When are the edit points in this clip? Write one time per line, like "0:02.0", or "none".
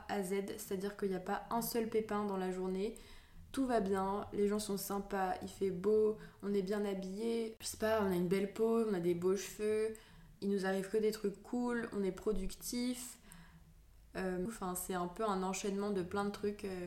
0:10.4
0:14.5